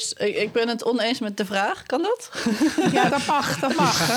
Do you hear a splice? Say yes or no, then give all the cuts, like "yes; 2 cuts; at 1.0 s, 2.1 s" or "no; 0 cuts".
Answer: yes; 1 cut; at 3.1 s